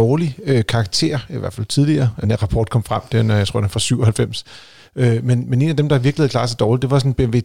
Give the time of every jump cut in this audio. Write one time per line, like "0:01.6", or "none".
0:02.2